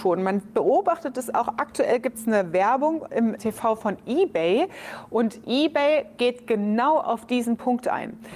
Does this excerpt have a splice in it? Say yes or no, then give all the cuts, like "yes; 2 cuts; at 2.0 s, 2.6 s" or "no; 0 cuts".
yes; 1 cut; at 3.4 s